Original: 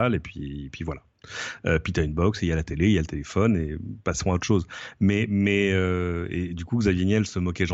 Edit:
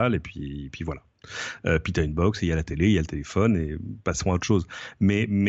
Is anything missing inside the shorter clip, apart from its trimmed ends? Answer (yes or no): no